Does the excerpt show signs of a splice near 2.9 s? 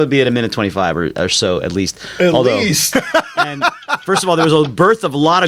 yes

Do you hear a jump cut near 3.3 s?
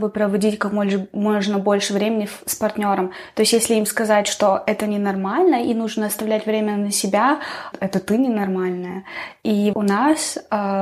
no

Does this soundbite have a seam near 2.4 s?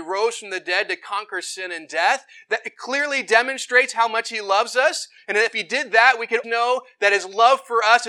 no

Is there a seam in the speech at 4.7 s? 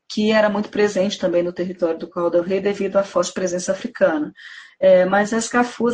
no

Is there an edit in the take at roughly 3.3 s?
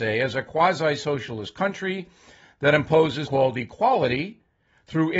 yes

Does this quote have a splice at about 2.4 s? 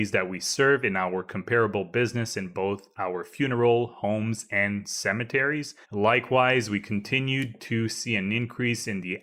no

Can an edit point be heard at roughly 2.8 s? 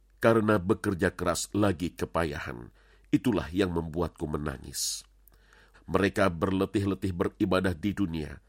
no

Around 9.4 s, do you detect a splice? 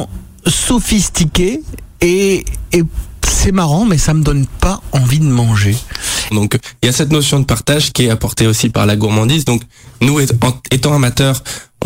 no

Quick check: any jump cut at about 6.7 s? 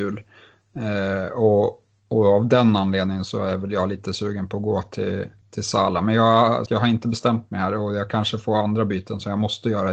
yes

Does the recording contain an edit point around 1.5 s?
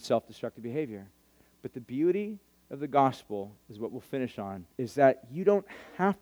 no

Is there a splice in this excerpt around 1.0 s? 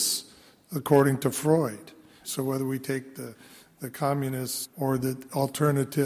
no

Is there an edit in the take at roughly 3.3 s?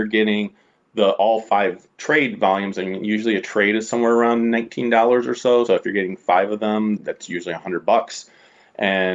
no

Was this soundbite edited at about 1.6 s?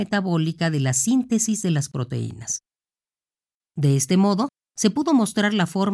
no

